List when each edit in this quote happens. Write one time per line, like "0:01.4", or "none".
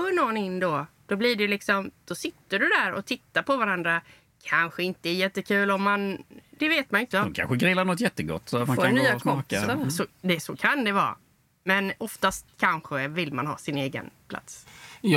0:07.1